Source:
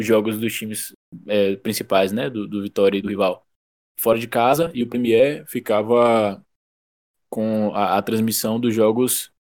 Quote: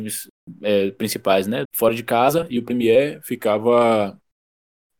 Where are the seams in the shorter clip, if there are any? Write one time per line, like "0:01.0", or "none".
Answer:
0:01.6